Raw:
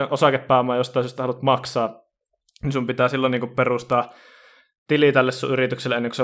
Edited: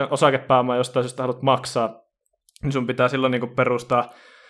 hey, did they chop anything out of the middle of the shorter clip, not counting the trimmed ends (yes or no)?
no